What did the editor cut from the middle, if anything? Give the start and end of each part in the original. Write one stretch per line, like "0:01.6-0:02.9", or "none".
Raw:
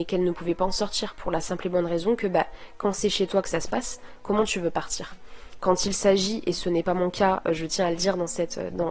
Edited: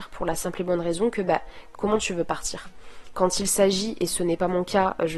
0:02.8-0:04.2